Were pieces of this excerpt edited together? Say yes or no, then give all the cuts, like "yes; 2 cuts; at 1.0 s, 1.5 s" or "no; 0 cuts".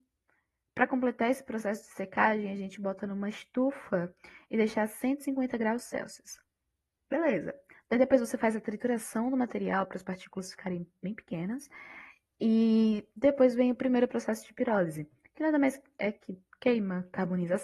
no; 0 cuts